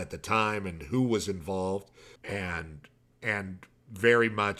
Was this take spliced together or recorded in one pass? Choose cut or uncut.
cut